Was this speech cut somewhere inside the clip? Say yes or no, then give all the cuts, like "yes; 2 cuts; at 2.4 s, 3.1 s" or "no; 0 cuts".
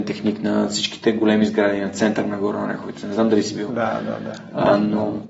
no; 0 cuts